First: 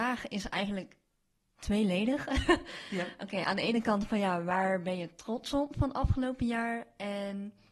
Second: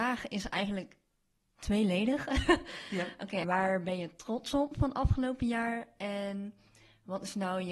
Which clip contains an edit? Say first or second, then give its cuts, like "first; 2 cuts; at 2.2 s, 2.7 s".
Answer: second; 1 cut; at 3.4 s